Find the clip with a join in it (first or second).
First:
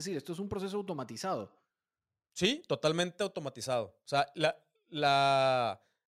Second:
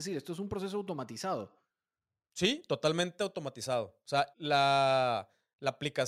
second